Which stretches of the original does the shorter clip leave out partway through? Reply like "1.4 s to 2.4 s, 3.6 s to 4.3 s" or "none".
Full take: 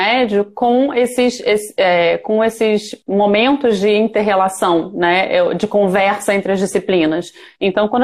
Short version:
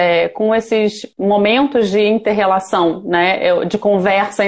none